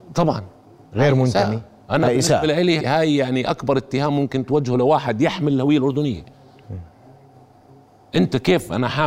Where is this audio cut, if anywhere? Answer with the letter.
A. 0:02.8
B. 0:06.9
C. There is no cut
A